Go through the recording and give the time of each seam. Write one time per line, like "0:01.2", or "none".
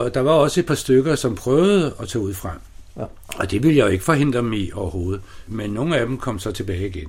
none